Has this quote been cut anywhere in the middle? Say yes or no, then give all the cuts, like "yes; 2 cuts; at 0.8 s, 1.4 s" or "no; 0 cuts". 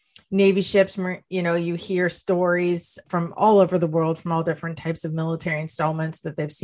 yes; 1 cut; at 3.0 s